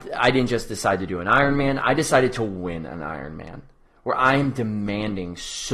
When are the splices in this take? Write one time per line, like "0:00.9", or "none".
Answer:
none

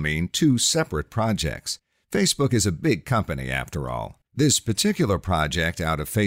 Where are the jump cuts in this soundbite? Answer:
0:04.3

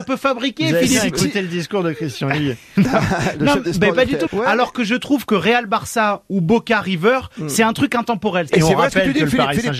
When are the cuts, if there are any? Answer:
0:04.3
0:08.5

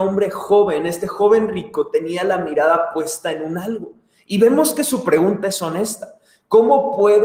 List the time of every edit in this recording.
none

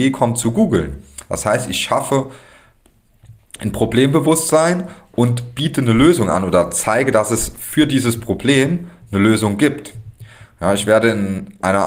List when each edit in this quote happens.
none

